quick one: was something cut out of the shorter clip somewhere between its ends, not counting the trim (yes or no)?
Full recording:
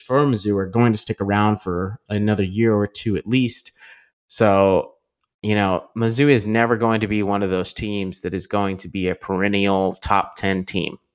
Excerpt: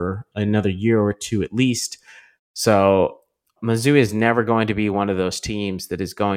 yes